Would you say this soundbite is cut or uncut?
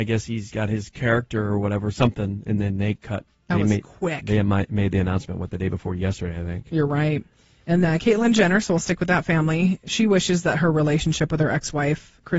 cut